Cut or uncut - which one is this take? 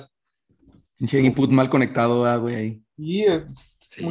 uncut